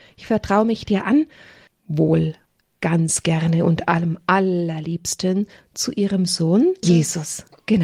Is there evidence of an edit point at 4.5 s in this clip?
no; 2 cuts; at 1.7 s, 6.8 s

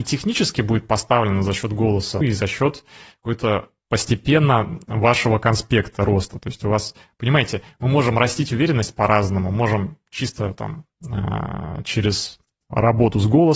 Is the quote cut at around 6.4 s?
no; 1 cut; at 2.2 s

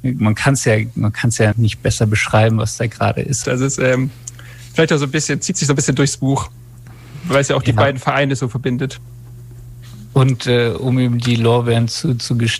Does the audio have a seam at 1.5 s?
yes; 2 cuts; at 1.5 s, 3.4 s

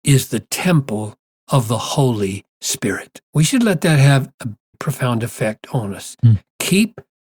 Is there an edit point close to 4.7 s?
yes; 2 cuts; at 3.2 s, 4.7 s

